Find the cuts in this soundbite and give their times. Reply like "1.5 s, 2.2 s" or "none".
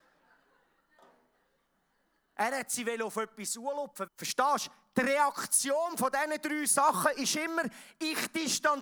4.1 s